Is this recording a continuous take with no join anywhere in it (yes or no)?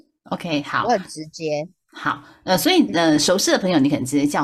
yes